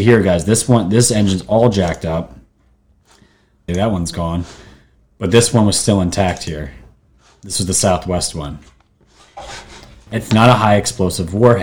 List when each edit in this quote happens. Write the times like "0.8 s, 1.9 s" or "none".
3.7 s, 10.1 s